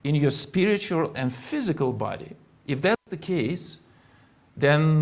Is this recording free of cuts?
yes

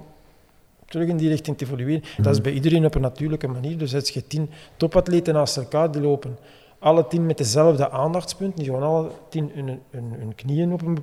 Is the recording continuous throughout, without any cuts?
no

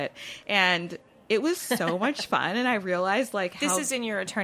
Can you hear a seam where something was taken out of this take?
no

